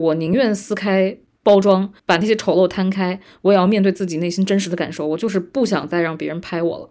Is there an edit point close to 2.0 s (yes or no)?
yes